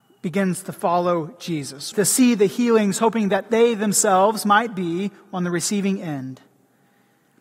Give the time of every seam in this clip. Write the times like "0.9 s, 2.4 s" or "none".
1.9 s

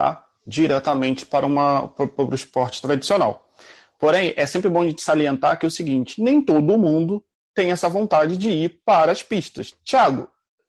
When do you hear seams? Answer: 9.7 s

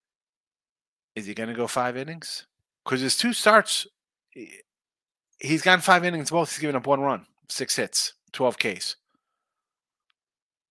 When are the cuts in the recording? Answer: none

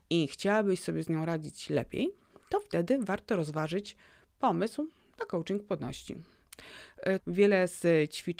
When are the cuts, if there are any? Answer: 7.2 s

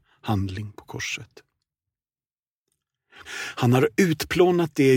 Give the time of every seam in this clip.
3.2 s

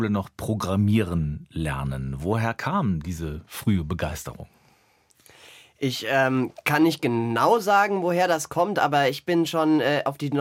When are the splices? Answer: none

